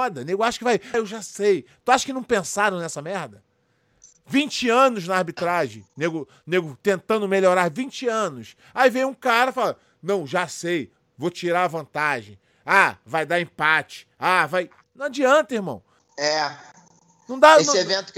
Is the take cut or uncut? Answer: cut